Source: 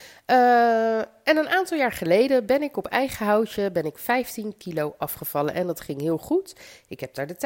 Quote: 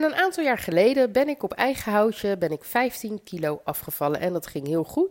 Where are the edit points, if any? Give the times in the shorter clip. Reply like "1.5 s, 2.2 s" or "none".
none